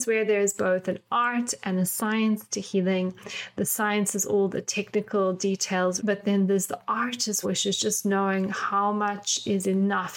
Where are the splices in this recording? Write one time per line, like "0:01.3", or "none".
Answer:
0:06.0
0:07.4